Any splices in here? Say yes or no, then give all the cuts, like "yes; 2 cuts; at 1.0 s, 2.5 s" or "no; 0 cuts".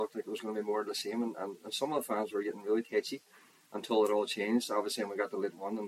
no; 0 cuts